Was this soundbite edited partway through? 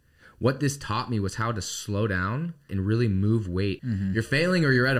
yes; 2 cuts; at 2.7 s, 3.8 s

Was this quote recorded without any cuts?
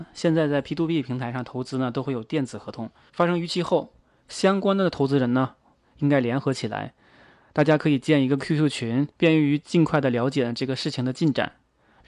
no; 2 cuts; at 3.1 s, 9.1 s

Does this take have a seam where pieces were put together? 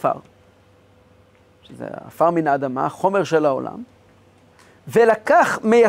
no; 0 cuts

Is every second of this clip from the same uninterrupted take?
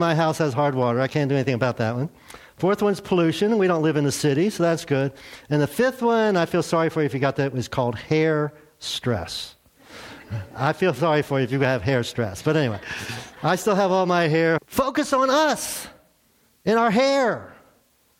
no; 2 cuts; at 1.1 s, 14.6 s

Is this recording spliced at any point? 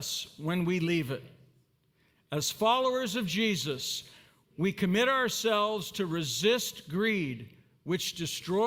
no; 0 cuts

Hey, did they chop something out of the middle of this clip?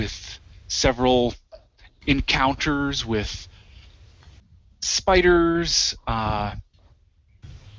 no; 0 cuts

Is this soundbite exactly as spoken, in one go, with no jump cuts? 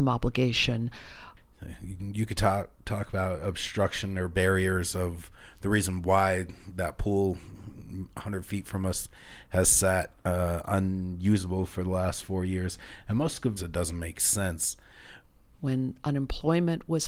no; 2 cuts; at 13.6 s, 15.5 s

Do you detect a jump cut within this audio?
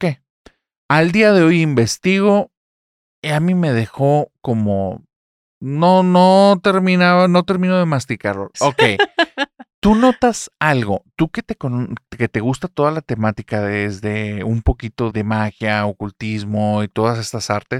yes; 2 cuts; at 8.5 s, 15.1 s

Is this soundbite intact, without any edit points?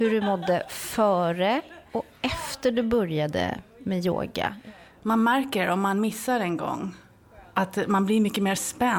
yes; 0 cuts

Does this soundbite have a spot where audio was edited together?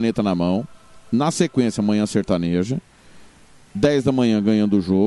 no; 0 cuts

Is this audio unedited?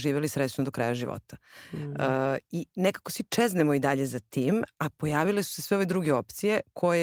yes; 0 cuts

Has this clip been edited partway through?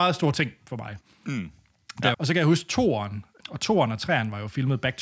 yes; 2 cuts; at 2.1 s, 3.4 s

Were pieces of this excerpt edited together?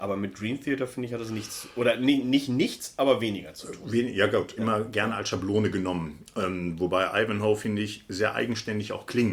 yes; 1 cut; at 4.6 s

